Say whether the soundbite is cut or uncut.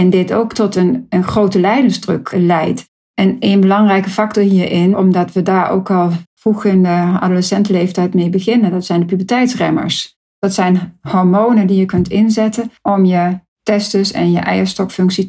cut